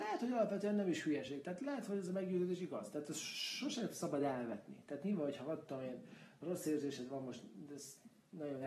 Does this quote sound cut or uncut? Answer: uncut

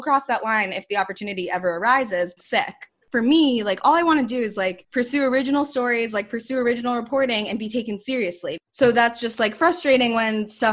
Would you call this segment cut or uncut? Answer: cut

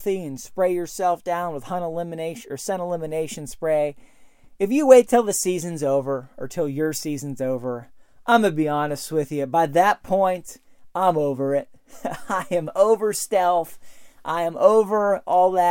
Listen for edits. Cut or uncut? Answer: uncut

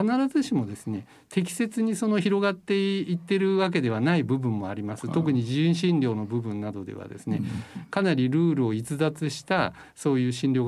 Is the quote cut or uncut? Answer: uncut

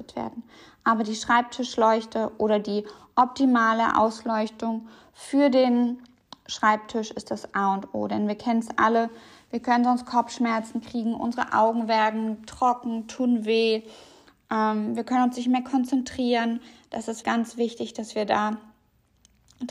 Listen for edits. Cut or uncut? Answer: cut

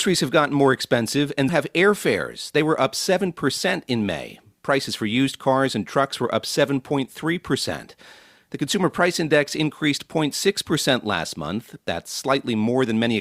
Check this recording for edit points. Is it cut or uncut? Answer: cut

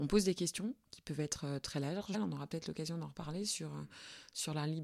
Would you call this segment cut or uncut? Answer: cut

